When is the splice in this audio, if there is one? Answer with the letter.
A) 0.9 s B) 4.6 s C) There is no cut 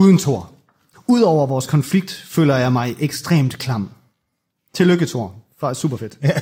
A